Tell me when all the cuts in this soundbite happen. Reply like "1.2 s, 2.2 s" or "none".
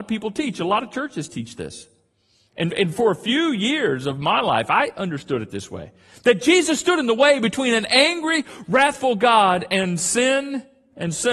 none